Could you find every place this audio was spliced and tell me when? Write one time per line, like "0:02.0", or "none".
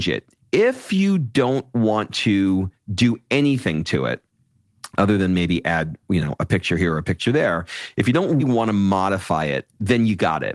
0:08.4